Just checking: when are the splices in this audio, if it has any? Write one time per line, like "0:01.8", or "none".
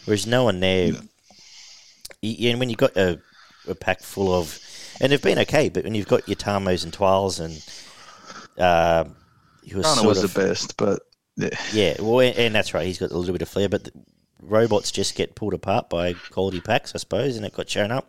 none